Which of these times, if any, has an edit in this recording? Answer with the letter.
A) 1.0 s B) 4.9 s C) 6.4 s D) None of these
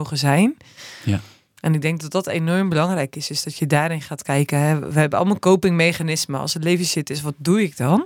D